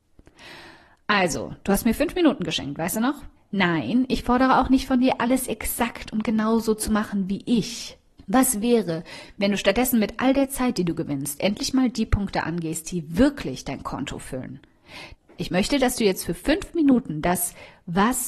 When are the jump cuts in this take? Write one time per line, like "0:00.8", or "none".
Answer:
0:03.4
0:08.2
0:15.1